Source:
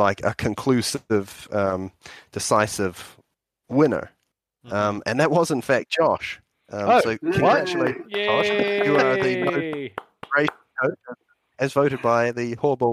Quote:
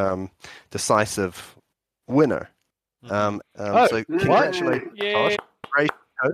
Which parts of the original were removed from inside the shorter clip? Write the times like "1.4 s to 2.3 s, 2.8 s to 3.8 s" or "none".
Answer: 5.0 s to 6.5 s, 8.5 s to 9.9 s